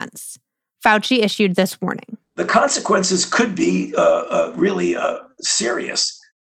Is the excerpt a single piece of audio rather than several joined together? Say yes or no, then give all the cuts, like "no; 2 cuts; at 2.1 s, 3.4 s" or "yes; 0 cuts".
yes; 0 cuts